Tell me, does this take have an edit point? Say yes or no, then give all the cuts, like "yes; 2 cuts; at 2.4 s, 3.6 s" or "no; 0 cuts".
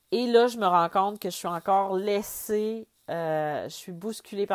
no; 0 cuts